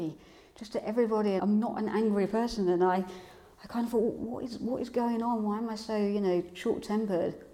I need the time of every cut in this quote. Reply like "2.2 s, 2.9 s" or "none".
1.4 s